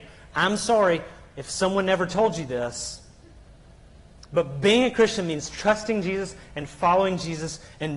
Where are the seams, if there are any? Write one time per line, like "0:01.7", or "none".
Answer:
none